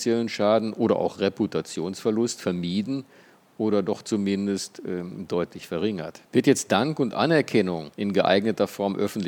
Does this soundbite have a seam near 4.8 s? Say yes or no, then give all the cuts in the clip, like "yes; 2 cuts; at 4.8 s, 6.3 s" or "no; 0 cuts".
no; 2 cuts; at 6.3 s, 7.9 s